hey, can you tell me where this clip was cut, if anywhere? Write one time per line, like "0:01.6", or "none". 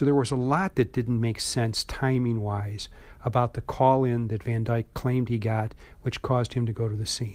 none